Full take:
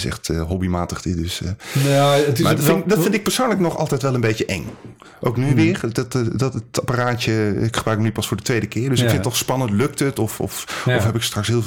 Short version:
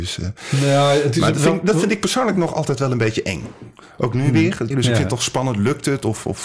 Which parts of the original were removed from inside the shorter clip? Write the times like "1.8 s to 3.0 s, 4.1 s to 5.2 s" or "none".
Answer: 5.9 s to 8.8 s